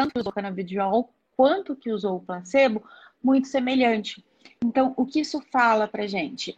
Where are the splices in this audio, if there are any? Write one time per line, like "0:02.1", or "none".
0:05.1